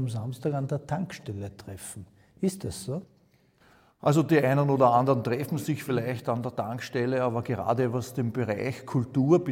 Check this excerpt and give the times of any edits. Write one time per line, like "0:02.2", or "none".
none